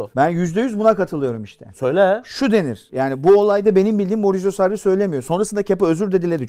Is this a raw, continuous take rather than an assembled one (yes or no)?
yes